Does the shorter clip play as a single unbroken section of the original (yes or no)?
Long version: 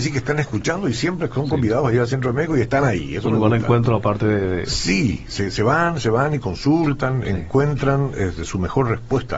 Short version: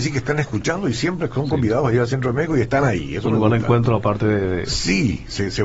yes